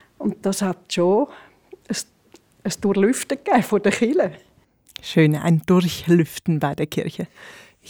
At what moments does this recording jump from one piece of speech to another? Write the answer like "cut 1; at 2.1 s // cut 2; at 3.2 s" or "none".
none